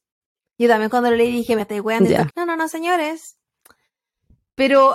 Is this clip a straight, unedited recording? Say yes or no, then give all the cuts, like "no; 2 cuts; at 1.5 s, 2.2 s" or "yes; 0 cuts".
no; 1 cut; at 2.3 s